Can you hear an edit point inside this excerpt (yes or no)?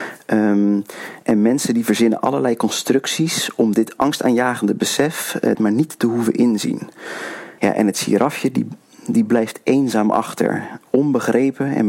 yes